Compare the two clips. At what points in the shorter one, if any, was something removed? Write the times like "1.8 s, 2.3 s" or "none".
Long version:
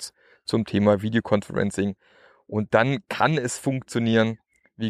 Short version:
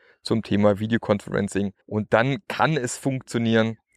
1.8 s